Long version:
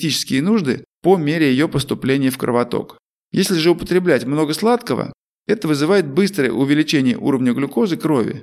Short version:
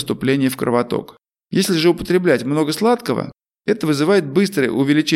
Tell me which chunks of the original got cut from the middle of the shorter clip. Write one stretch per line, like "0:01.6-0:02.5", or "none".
none